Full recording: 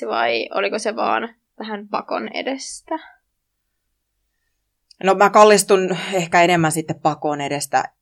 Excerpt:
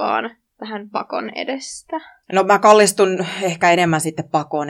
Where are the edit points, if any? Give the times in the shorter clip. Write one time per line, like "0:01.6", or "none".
0:02.2